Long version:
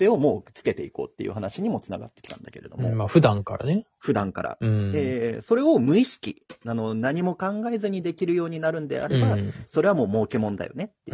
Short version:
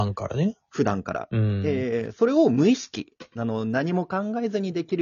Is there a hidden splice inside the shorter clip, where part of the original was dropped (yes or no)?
no